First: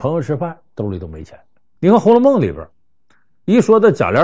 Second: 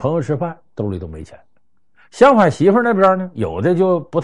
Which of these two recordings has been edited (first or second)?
first